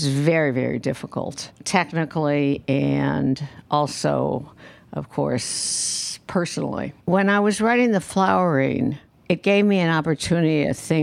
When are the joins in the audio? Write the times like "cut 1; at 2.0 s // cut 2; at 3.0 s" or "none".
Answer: cut 1; at 7.0 s